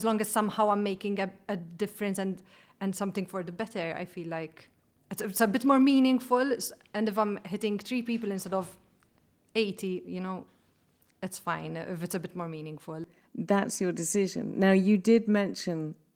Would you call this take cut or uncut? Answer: uncut